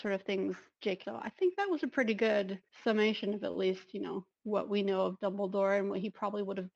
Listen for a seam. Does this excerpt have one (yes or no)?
yes